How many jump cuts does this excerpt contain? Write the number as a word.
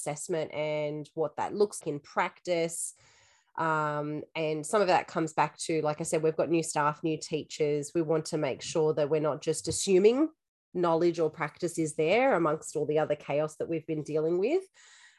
one